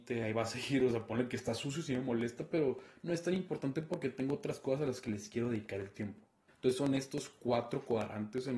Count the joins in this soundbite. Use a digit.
1